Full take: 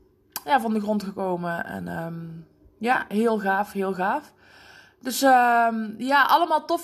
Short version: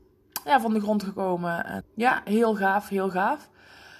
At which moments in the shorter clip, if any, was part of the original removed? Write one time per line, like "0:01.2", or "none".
0:01.8